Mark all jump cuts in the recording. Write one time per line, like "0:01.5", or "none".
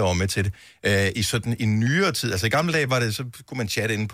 none